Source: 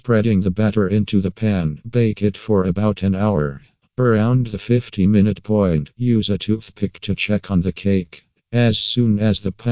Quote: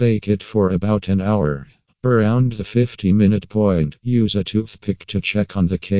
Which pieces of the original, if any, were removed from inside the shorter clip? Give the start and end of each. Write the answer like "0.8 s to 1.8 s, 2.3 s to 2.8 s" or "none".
none